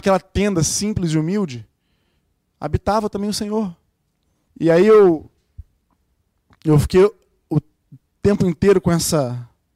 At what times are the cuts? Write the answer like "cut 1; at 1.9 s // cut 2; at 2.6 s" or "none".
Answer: cut 1; at 4.5 s